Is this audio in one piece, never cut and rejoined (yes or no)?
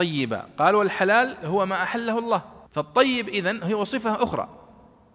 no